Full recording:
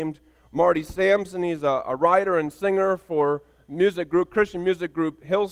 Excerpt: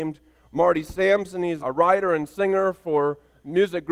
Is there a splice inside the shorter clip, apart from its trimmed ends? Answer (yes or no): yes